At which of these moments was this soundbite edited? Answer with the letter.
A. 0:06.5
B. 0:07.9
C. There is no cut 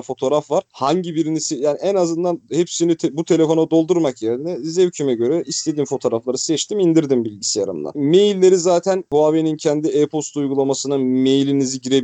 B